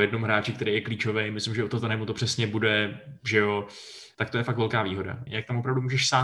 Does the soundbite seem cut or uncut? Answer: cut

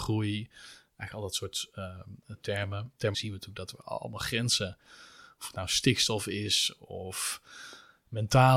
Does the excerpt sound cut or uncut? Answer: cut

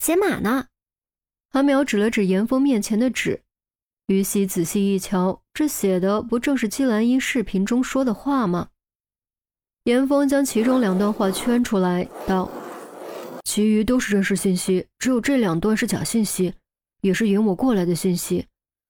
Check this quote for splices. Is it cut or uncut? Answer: uncut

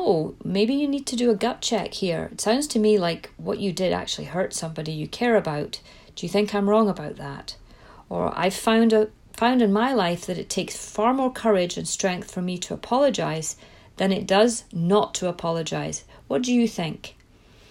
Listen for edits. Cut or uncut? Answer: uncut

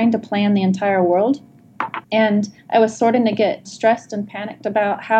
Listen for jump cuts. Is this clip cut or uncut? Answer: cut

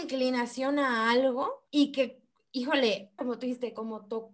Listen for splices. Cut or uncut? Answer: cut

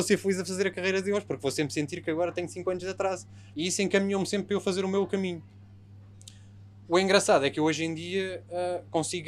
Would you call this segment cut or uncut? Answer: cut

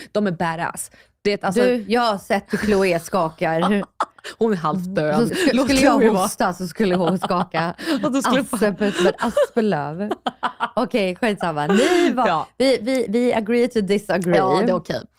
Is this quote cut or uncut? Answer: cut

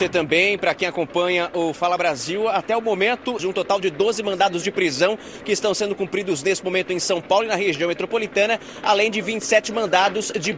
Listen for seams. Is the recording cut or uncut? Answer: cut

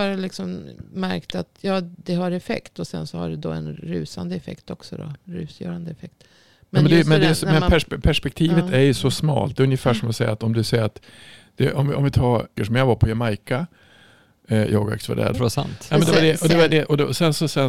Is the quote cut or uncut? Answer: cut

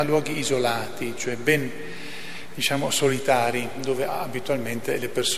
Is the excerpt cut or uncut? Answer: uncut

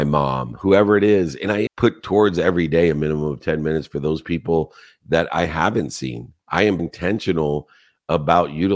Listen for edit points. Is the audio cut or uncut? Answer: cut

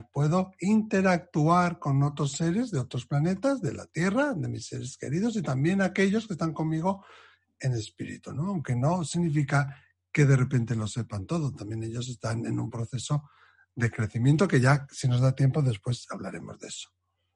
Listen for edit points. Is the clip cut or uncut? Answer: uncut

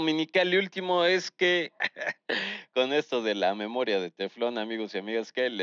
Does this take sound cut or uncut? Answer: cut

